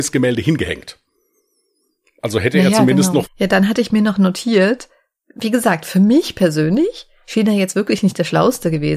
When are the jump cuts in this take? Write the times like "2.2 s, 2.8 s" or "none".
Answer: 3.2 s